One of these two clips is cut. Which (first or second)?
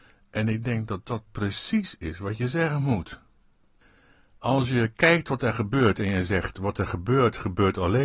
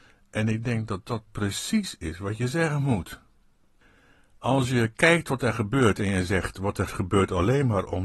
second